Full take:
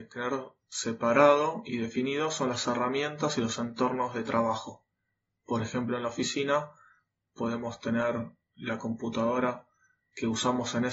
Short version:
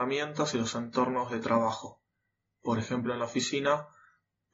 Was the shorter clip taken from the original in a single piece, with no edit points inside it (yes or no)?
yes